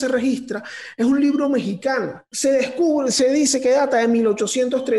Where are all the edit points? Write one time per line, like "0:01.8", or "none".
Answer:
none